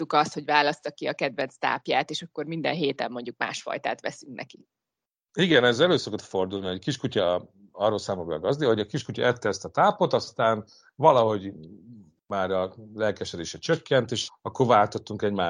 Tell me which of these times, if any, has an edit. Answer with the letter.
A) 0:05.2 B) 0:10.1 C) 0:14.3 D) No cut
C